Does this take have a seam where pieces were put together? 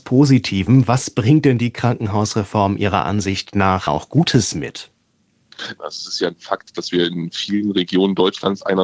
yes; 1 cut; at 5.8 s

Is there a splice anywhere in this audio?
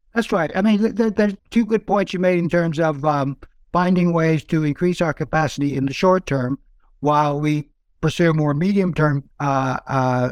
yes; 2 cuts; at 1.4 s, 9.3 s

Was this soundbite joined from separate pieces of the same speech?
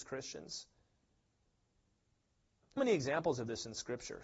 yes; 1 cut; at 2.8 s

